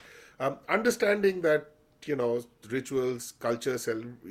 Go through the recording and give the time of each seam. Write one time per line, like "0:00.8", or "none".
none